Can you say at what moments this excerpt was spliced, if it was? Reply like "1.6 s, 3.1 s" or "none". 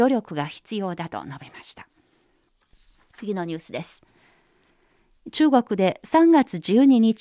none